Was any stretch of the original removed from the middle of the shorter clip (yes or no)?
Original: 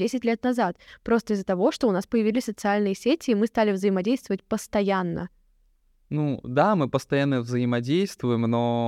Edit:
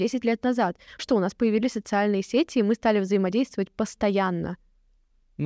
yes